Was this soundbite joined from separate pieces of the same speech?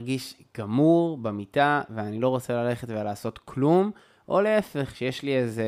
no; 0 cuts

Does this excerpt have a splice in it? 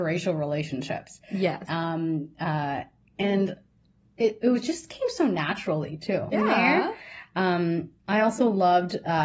yes; 2 cuts; at 1.7 s, 6.3 s

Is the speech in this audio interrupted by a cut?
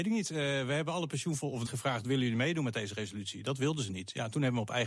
yes; 1 cut; at 1.7 s

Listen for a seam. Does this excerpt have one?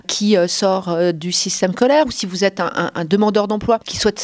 yes; 1 cut; at 2.0 s

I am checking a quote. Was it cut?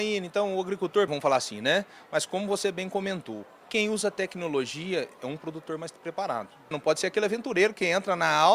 yes; 2 cuts; at 1.1 s, 6.7 s

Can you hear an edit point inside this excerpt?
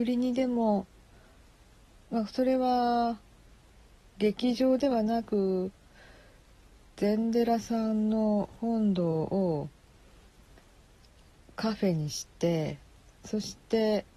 no; 0 cuts

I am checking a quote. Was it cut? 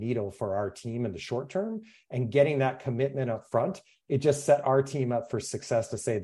no; 0 cuts

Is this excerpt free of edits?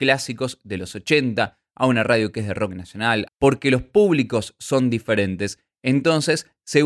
no; 1 cut; at 3.3 s

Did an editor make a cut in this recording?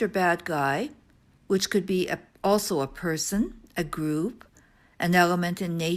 no; 0 cuts

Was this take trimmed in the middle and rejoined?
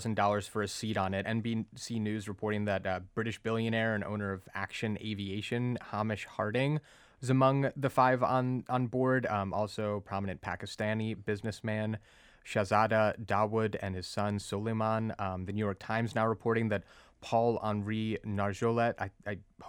yes; 1 cut; at 1.2 s

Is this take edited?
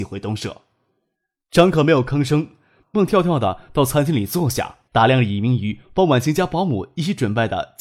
yes; 2 cuts; at 2.9 s, 4.8 s

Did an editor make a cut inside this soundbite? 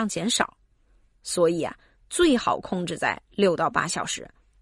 no; 0 cuts

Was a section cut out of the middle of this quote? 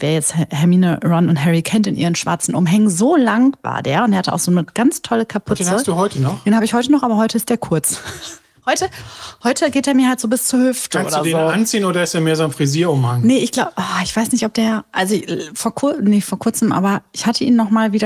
no; 0 cuts

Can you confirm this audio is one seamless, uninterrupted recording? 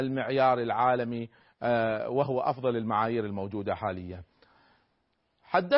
yes; 0 cuts

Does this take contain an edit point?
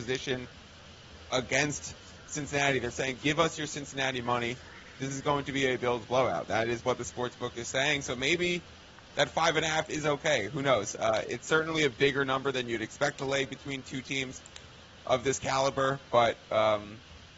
no; 0 cuts

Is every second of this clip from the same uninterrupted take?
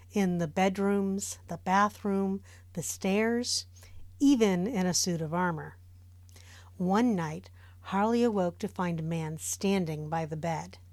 yes; 0 cuts

